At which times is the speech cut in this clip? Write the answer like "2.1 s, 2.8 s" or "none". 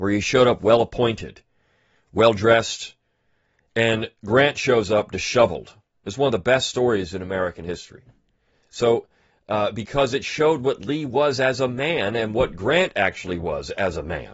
none